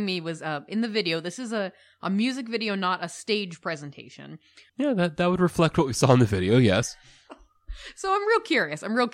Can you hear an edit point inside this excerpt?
yes; 1 cut; at 4.7 s

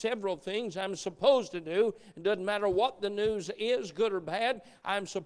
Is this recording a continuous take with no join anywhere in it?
yes; 0 cuts

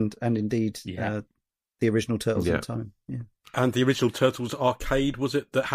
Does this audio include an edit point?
no; 0 cuts

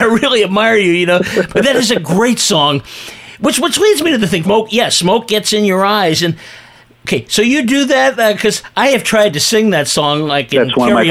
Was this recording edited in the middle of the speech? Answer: yes; 1 cut; at 4.4 s

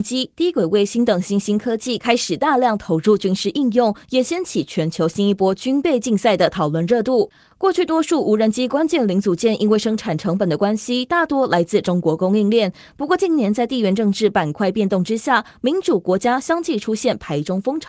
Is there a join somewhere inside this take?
no; 0 cuts

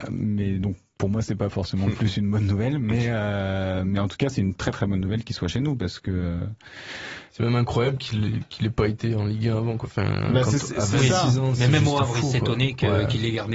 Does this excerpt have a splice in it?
no; 0 cuts

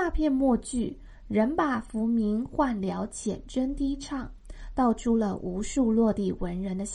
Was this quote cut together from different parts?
no; 0 cuts

